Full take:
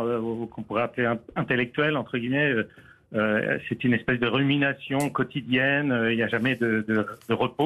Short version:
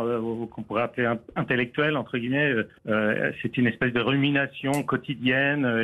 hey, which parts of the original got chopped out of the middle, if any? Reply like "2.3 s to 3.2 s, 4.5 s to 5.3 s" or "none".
2.8 s to 3.0 s